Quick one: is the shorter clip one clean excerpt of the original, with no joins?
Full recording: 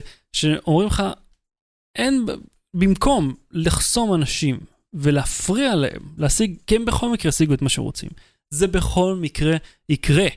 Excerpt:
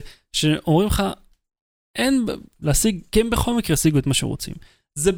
no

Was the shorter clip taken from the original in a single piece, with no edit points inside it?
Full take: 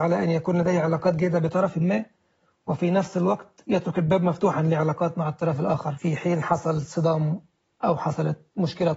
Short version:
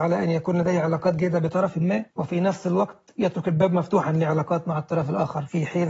no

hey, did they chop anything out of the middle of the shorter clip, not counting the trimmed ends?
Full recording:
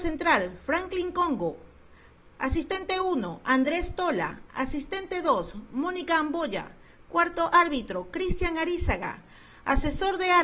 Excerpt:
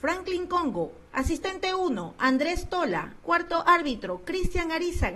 yes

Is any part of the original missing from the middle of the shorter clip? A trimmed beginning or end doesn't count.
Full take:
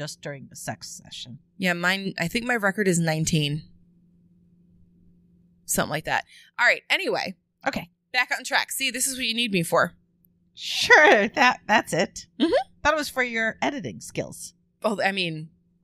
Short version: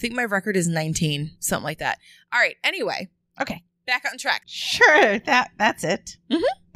yes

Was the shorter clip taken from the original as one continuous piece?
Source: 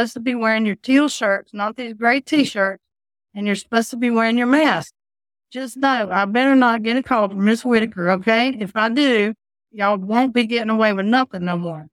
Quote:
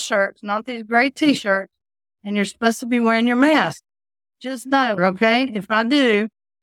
no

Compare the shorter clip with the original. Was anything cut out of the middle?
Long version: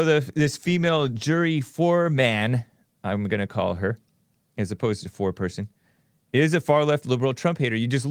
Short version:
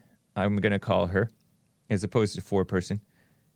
no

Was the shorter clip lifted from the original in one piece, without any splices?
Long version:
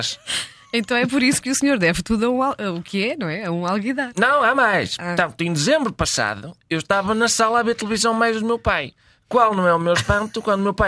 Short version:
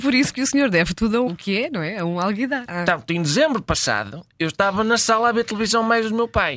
no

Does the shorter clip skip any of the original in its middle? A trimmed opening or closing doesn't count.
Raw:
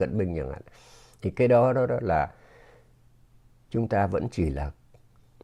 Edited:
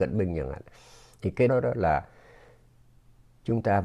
yes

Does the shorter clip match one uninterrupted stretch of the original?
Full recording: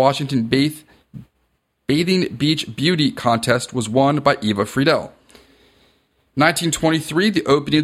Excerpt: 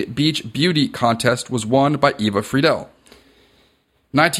yes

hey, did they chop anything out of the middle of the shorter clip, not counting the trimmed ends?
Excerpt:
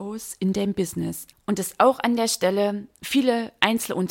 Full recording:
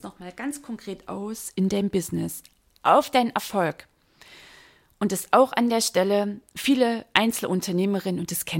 yes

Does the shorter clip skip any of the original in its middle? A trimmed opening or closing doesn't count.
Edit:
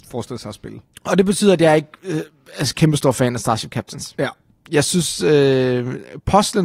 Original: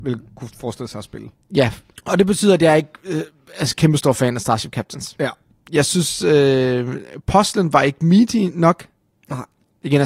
yes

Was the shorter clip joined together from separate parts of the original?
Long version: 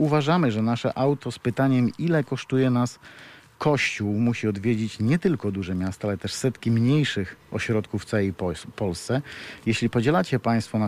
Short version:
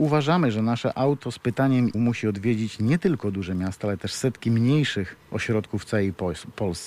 yes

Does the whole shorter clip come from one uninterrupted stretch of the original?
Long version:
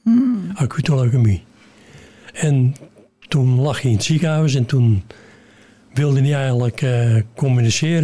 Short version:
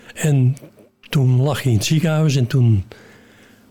yes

